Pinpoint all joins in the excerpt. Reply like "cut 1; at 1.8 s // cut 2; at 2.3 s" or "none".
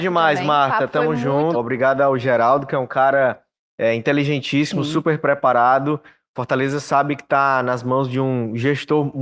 cut 1; at 1.5 s